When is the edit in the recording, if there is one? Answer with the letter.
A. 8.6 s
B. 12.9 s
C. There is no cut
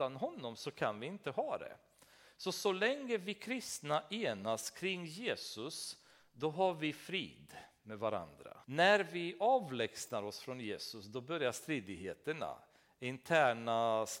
A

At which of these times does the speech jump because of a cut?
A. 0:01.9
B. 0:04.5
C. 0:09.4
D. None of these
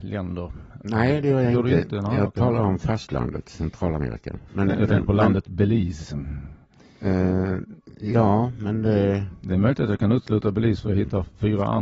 B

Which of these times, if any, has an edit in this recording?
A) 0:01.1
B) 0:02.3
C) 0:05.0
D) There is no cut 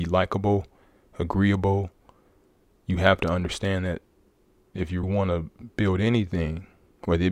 C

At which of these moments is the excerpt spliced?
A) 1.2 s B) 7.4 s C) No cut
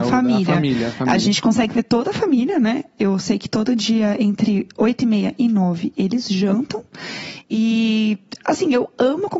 B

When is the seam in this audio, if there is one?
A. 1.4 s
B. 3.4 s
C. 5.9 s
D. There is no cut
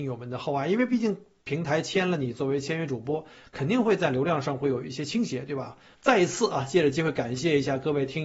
C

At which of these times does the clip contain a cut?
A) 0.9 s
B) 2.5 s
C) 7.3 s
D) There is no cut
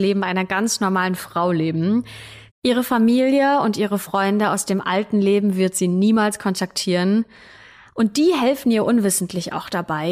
B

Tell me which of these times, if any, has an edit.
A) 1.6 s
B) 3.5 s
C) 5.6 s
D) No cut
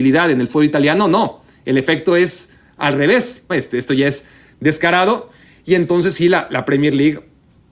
B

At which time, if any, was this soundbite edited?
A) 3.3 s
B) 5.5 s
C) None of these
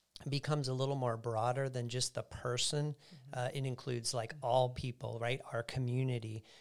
C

